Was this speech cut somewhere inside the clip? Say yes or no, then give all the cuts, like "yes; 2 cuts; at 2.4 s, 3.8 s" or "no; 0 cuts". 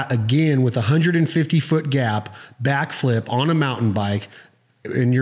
no; 0 cuts